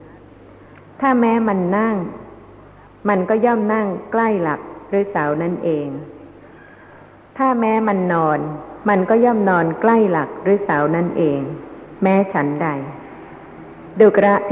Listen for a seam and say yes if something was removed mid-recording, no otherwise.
no